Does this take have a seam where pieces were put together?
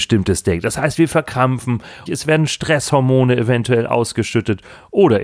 yes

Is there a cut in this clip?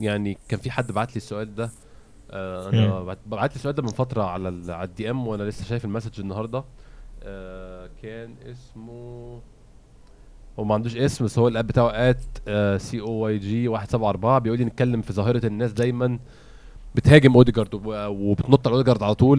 no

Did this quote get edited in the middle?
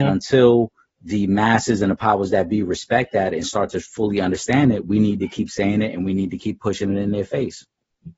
no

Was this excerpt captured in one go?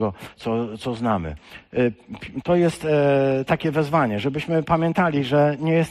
no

